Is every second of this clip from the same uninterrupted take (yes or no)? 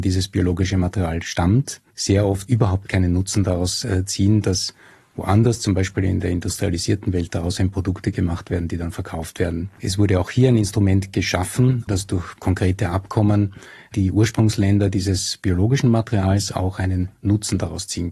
no